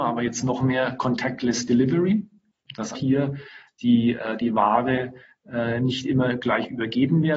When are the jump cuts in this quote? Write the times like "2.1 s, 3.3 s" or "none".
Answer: 2.9 s